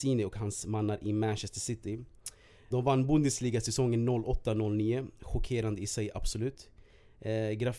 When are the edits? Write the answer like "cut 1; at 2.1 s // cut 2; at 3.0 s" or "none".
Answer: cut 1; at 2.7 s